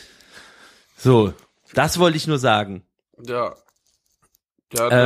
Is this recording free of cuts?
yes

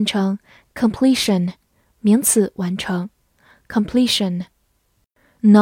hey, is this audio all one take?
yes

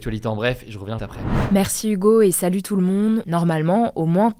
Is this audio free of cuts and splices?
no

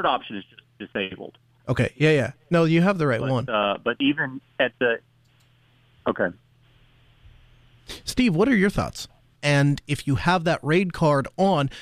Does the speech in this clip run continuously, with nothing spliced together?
no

